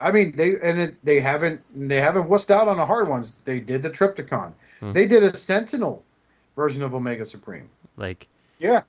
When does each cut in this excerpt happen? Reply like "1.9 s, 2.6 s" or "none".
4.9 s, 7.9 s